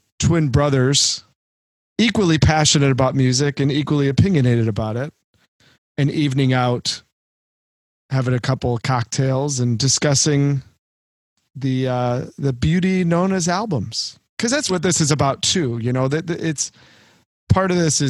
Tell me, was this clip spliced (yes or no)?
yes